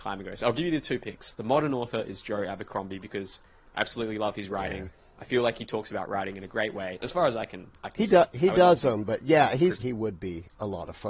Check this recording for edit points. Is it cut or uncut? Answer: cut